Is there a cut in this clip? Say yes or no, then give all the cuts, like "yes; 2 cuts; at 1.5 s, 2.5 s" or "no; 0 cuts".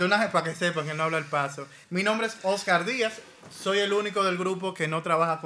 yes; 1 cut; at 1.8 s